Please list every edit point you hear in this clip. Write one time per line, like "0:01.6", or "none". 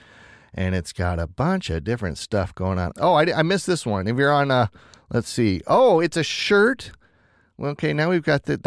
0:02.9